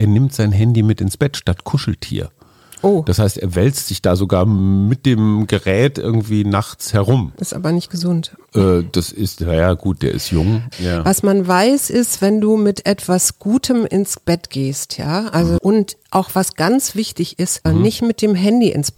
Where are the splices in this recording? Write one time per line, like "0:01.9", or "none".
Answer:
0:10.7
0:15.6
0:17.7